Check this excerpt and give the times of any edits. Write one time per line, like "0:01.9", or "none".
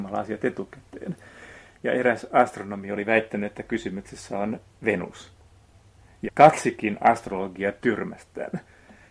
0:01.7